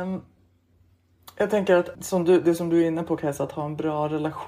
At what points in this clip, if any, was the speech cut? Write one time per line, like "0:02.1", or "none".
0:01.9

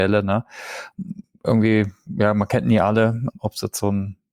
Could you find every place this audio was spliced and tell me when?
none

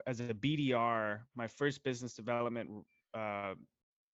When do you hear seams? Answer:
none

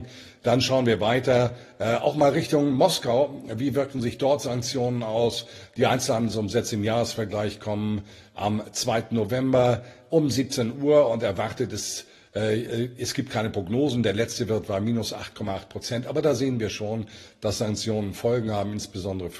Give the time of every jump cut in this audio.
none

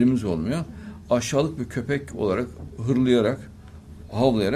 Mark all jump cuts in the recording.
none

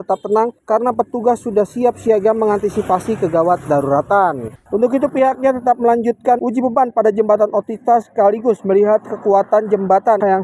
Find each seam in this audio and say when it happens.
0:04.7

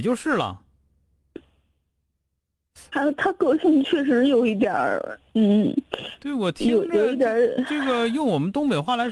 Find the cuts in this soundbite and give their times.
0:02.9

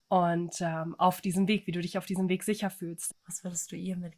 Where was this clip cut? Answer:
0:03.1

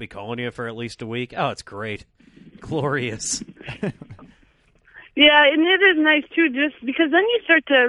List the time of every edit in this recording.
none

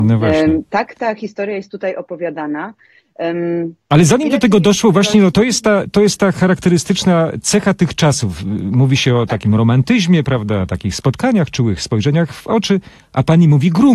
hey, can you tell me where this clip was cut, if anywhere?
0:05.3

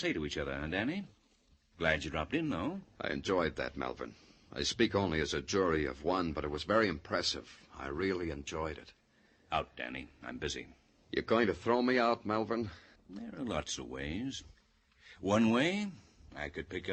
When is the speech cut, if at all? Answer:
0:13.0

